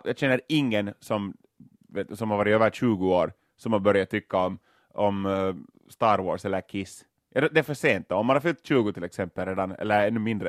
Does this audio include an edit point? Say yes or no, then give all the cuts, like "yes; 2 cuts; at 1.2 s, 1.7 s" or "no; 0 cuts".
no; 0 cuts